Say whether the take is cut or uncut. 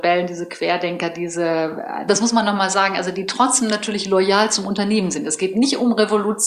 cut